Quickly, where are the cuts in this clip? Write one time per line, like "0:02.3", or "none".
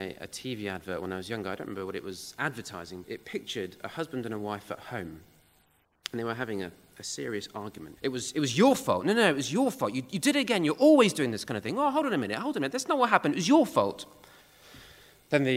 0:03.0
0:08.0